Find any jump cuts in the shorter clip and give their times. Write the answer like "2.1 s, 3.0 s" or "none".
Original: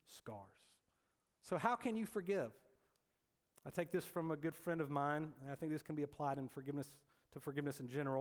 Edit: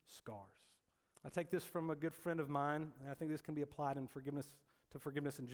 1.1 s